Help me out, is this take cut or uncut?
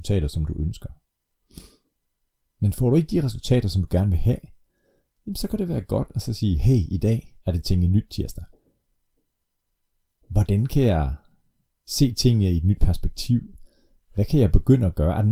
uncut